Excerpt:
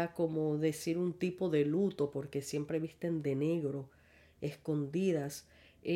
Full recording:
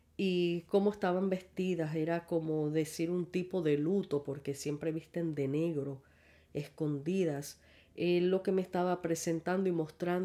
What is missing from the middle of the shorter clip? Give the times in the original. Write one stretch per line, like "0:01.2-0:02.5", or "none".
none